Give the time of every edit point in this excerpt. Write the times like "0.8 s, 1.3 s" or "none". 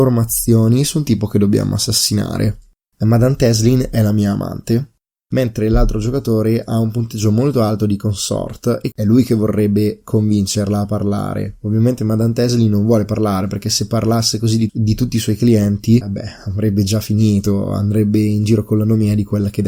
8.9 s, 14.7 s, 16.0 s